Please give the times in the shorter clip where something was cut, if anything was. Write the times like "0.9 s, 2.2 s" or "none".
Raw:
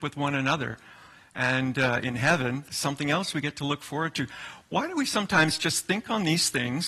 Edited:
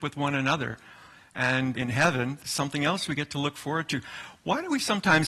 1.7 s